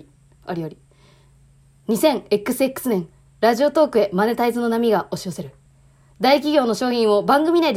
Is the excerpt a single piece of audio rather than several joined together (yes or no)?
yes